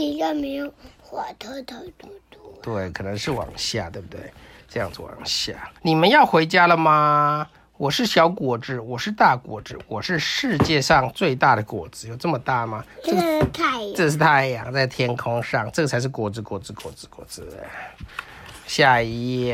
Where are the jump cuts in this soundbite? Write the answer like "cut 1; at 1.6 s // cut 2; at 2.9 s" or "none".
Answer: cut 1; at 5.8 s // cut 2; at 12.9 s